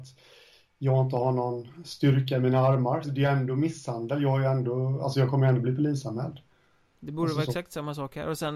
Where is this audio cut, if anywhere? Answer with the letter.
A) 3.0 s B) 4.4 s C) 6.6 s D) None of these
A